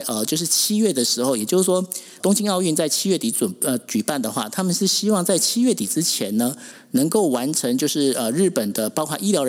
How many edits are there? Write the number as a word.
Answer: one